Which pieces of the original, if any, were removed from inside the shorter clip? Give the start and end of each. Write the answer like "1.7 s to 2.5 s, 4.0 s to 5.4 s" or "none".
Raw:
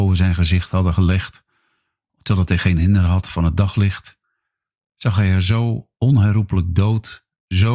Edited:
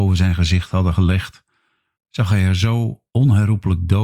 2.0 s to 4.8 s